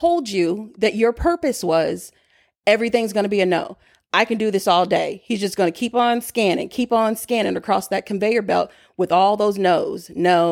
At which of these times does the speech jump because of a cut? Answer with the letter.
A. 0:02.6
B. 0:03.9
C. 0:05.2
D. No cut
D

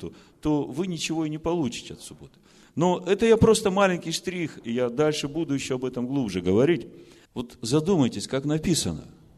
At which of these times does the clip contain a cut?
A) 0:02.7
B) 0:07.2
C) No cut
B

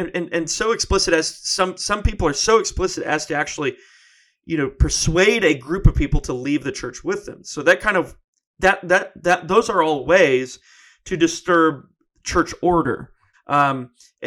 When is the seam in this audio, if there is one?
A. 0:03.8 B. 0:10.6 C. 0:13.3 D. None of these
C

